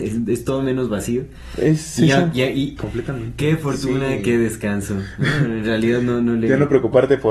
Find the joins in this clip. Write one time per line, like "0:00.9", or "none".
0:02.8